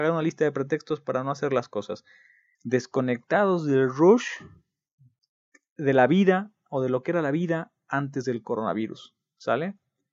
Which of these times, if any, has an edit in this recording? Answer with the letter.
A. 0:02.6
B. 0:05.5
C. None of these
A